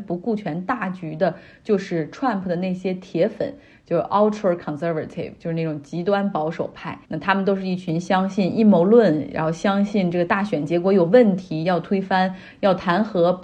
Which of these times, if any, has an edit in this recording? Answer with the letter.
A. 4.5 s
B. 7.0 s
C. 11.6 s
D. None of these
B